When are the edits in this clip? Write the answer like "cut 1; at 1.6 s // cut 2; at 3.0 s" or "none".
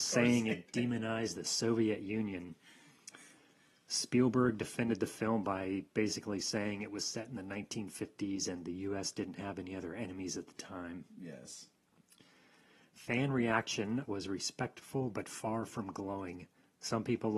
cut 1; at 14.0 s